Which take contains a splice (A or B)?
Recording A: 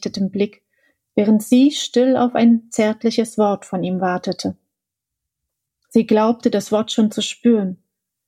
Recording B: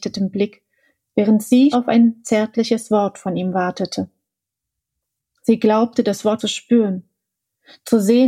B